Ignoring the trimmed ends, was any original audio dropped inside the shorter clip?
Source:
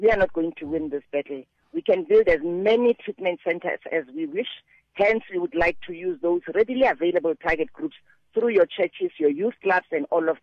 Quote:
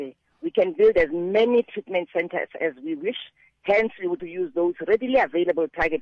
yes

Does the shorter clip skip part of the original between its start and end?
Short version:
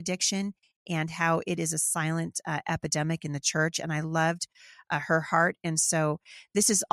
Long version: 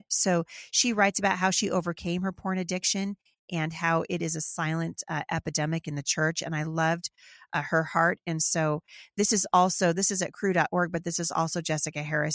no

